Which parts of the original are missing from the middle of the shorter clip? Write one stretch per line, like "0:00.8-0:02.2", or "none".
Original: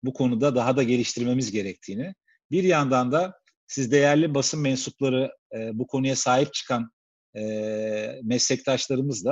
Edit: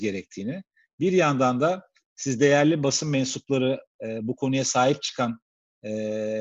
none